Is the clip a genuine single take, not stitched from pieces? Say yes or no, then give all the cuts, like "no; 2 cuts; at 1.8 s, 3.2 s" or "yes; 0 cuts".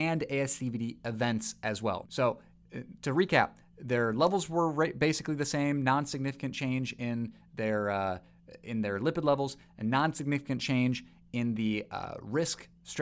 no; 1 cut; at 2.0 s